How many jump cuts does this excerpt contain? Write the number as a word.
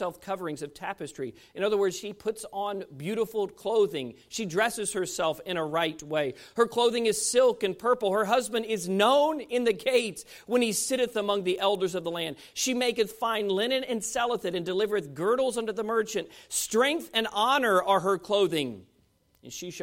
zero